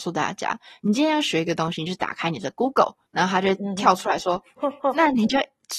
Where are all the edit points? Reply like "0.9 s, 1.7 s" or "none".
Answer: 3.1 s, 4.6 s